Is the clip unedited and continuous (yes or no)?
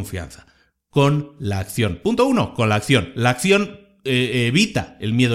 yes